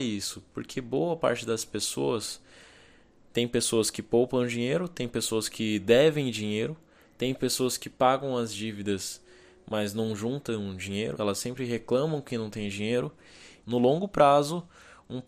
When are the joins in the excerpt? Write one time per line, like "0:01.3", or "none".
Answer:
0:11.1
0:13.6

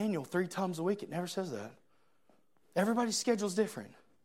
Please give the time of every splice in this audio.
none

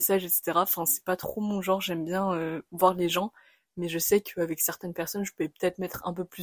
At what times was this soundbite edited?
none

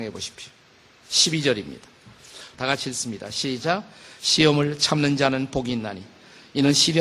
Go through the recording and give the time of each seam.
0:02.5

